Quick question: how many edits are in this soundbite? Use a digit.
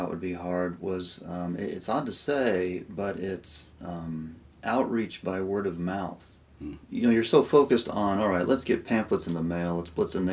1